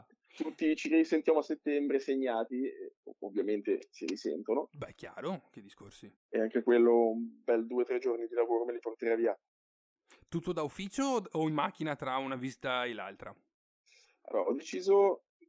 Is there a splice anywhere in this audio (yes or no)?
yes